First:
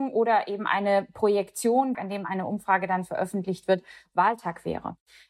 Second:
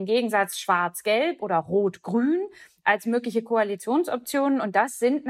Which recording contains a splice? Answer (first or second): first